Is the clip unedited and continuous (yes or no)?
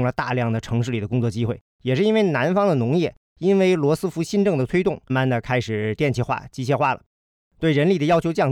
no